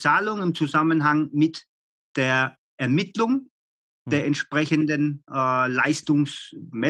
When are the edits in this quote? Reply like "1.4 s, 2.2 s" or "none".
none

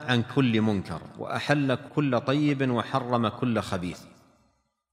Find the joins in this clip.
1.9 s

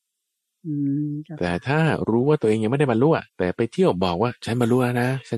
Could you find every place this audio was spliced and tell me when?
3.3 s

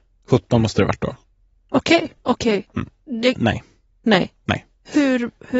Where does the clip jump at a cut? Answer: 2.2 s, 3.3 s

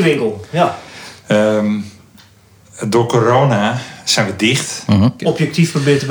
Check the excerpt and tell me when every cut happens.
5.2 s

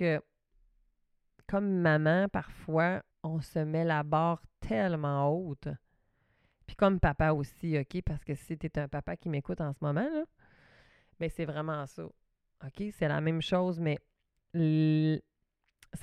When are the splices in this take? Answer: 3.1 s

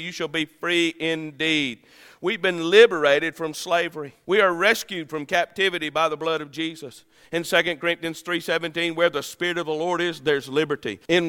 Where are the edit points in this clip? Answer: none

